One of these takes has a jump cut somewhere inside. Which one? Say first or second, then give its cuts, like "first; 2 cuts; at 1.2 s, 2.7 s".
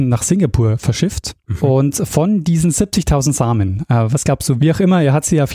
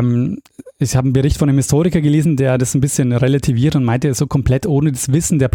first; 1 cut; at 4.6 s